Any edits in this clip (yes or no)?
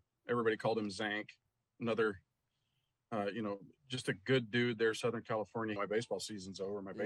yes